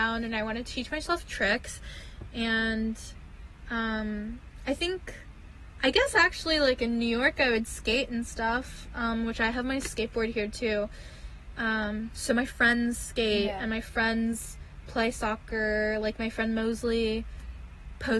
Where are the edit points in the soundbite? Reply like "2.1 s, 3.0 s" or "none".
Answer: none